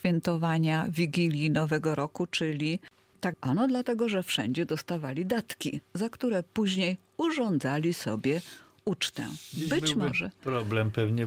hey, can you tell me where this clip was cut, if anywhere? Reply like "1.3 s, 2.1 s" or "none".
3.3 s